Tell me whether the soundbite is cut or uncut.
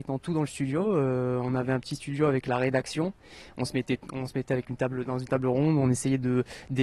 uncut